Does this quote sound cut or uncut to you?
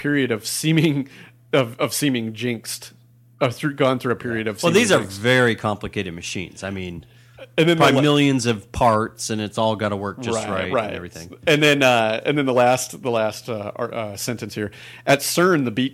uncut